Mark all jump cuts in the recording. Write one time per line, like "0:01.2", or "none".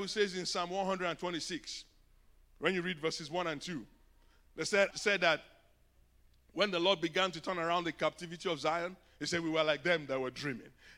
0:04.9